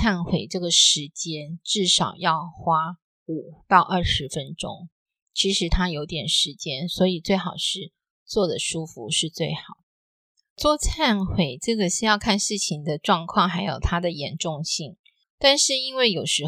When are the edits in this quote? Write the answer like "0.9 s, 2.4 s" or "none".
15.2 s